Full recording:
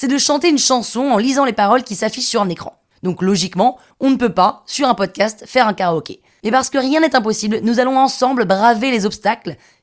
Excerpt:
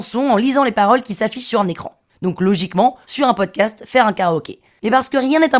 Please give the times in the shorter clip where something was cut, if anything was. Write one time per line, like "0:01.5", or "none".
0:03.0